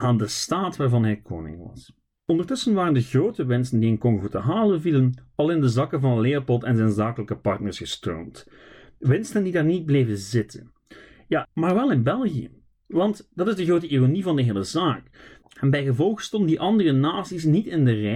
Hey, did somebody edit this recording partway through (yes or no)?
yes